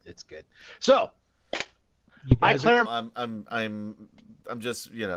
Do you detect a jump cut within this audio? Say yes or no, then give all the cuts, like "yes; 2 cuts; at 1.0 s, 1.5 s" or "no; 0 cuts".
yes; 1 cut; at 2.8 s